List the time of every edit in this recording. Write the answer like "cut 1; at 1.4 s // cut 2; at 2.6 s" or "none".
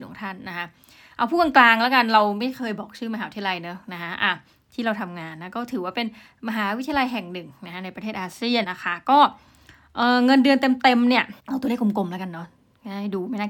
cut 1; at 8.6 s // cut 2; at 11.4 s